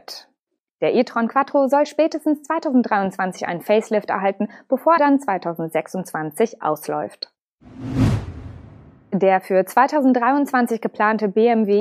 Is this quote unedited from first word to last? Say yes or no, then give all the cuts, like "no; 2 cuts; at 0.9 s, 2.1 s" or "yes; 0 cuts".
no; 1 cut; at 5.0 s